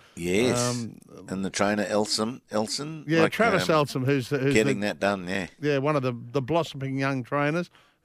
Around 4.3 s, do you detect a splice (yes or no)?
no